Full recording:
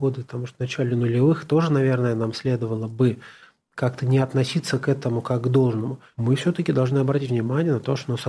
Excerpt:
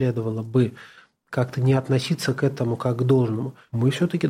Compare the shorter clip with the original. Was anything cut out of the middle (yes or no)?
no